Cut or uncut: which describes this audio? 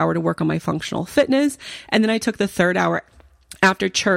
uncut